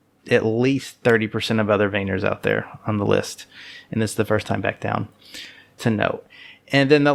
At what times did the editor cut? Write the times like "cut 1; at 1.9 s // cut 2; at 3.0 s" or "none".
cut 1; at 3.8 s // cut 2; at 5.8 s